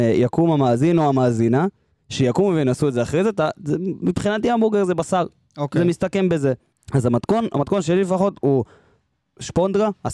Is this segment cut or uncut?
cut